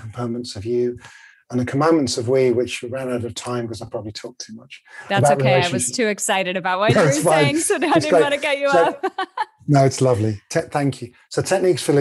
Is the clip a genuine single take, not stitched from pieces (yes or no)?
yes